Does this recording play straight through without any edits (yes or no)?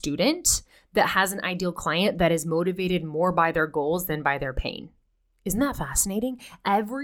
yes